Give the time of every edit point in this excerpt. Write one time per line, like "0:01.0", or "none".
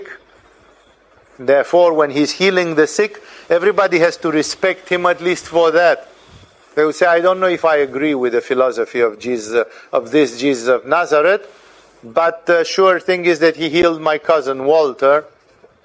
none